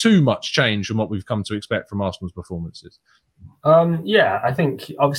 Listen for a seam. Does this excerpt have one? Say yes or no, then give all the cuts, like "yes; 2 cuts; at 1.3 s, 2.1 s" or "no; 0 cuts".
no; 0 cuts